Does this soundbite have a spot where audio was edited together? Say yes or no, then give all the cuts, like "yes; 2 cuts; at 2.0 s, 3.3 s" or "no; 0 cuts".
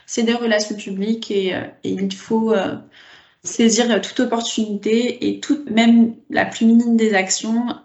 yes; 1 cut; at 5.7 s